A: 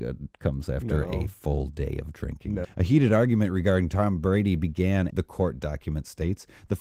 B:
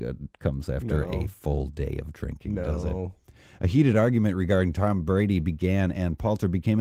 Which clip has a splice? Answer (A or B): A